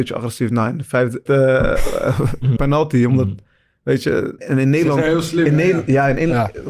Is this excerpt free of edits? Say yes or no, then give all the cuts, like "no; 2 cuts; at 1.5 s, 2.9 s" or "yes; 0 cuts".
no; 3 cuts; at 1.3 s, 2.6 s, 4.4 s